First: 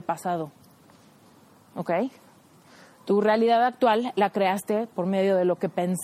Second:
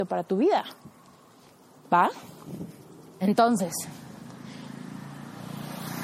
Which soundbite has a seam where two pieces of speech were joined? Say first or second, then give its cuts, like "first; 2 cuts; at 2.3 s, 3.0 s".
second; 1 cut; at 3.2 s